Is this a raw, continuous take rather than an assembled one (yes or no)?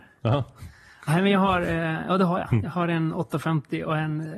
yes